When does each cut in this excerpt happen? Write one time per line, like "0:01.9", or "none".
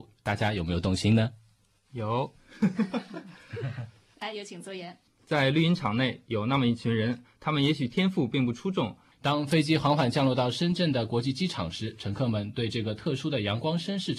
0:05.1
0:09.1